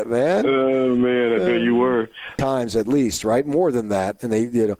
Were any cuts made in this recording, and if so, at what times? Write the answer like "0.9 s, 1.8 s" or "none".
2.4 s